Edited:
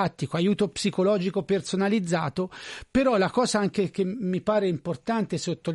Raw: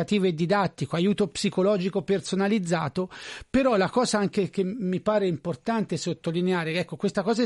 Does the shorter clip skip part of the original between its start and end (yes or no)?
no